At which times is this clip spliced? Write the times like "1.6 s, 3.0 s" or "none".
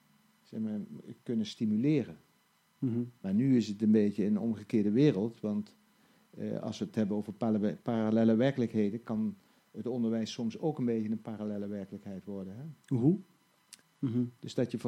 13.8 s